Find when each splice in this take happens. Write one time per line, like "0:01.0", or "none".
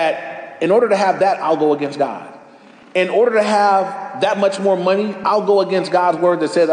none